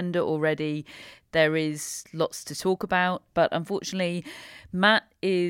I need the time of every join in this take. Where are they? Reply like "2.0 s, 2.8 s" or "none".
3.3 s